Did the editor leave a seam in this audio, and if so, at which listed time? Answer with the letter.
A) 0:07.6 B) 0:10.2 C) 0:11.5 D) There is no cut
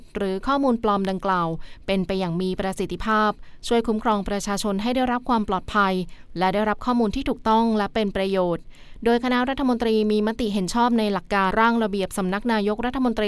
C